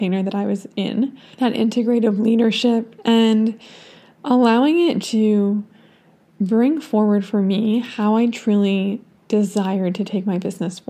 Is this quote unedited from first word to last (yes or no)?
no